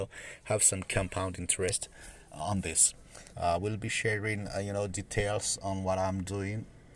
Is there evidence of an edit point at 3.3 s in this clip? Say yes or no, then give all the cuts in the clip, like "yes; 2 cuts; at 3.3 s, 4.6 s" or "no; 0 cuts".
yes; 1 cut; at 3.3 s